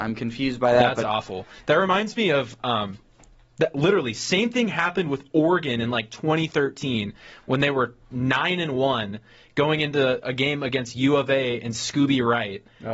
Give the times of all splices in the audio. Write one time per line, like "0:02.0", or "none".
none